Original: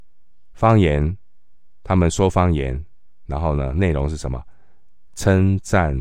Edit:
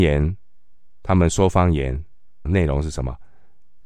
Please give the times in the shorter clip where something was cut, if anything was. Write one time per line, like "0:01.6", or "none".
0:02.5